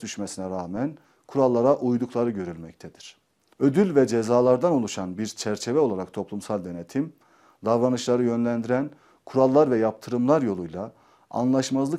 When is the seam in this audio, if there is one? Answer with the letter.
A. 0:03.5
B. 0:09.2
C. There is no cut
A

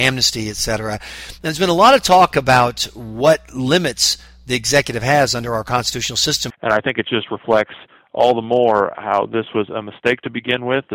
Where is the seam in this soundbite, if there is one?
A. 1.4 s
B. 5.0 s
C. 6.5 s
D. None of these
C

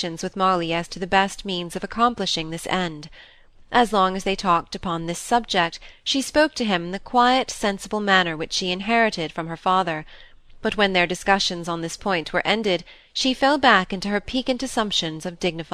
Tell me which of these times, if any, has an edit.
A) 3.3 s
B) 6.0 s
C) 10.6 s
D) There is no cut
D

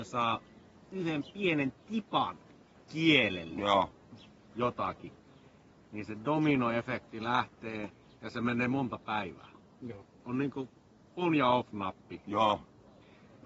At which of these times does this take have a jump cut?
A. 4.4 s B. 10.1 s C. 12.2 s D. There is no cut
D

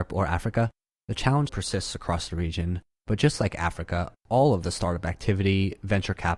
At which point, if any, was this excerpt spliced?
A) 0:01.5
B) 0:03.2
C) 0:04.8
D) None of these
A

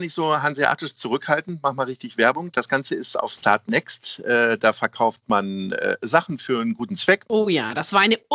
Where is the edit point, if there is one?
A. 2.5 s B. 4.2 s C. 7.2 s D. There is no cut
C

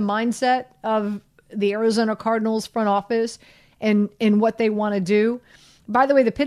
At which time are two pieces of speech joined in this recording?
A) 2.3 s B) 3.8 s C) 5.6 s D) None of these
D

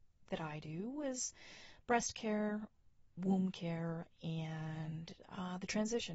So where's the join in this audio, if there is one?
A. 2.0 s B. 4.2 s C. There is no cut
C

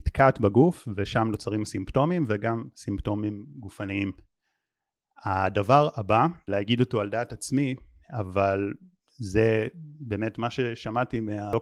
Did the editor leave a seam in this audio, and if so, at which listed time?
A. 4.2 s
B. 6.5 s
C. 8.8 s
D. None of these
B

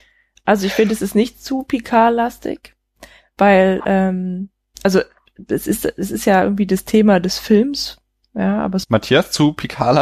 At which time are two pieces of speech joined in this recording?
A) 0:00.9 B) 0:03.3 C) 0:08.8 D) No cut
C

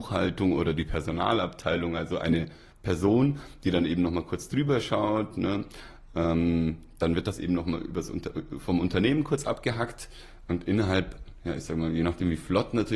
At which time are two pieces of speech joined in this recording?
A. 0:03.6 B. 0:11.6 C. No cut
C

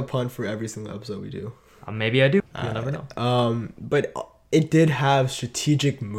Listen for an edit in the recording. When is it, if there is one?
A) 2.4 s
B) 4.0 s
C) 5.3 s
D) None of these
A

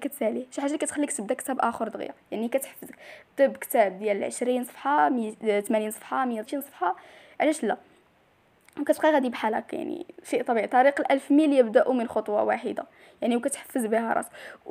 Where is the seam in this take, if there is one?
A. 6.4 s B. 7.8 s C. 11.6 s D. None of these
A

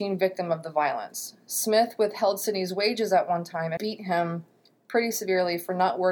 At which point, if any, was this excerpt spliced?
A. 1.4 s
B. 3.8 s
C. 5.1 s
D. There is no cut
B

